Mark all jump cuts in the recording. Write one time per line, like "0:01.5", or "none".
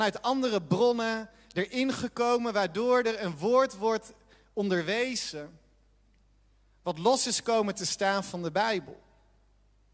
none